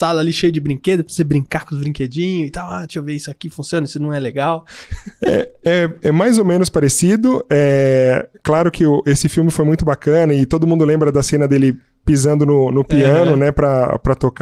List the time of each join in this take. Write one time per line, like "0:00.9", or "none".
none